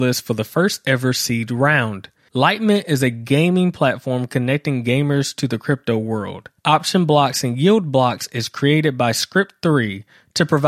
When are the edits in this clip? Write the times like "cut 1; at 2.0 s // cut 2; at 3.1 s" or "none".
cut 1; at 2.3 s // cut 2; at 6.6 s